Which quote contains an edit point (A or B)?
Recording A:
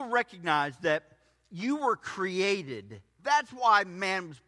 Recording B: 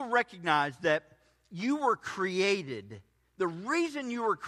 A